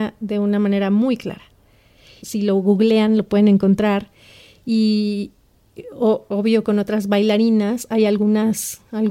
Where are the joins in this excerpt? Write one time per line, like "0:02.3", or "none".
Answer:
0:02.2